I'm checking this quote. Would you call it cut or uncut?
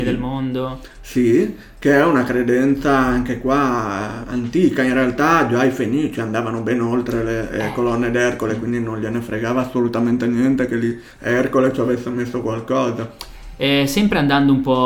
cut